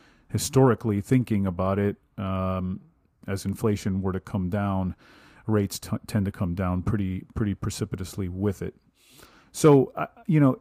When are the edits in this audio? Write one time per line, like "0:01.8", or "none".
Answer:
none